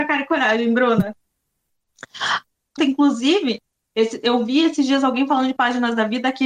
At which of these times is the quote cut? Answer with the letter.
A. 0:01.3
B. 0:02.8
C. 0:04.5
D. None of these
B